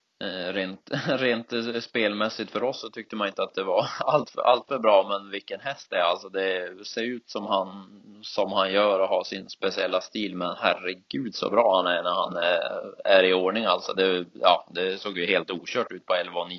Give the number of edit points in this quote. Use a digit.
0